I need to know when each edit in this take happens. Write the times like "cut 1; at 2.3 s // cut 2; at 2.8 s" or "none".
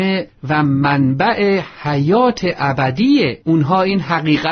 cut 1; at 3.4 s

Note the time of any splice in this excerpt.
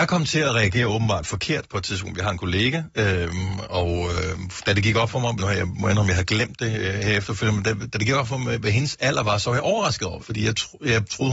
cut 1; at 5.4 s // cut 2; at 10.2 s

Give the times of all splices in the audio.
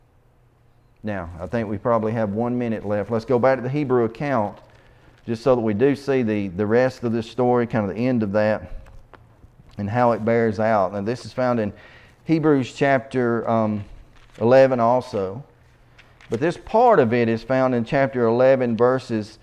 none

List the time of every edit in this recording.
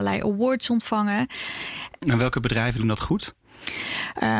cut 1; at 2.0 s

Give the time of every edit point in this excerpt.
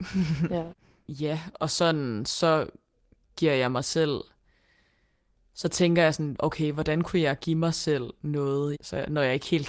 cut 1; at 8.7 s

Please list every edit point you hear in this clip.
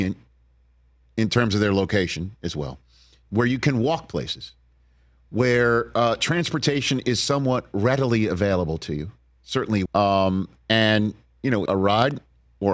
cut 1; at 9.9 s // cut 2; at 11.7 s

